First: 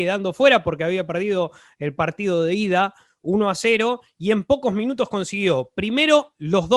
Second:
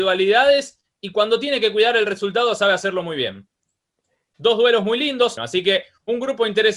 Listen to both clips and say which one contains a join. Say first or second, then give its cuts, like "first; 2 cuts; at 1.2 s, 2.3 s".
second; 2 cuts; at 4.3 s, 5.4 s